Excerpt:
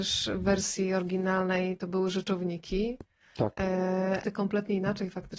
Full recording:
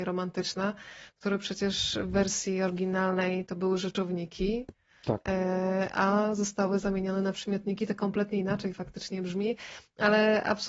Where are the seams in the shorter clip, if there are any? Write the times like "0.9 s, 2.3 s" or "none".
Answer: 4.2 s